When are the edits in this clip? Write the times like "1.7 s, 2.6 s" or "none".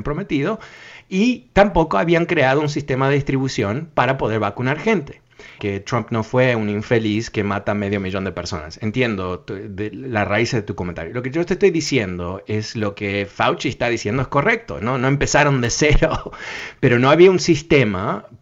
5.6 s